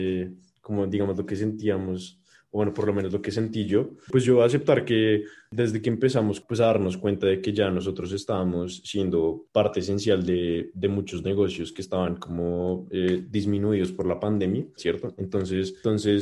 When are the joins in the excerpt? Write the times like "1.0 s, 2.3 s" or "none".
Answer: 14.8 s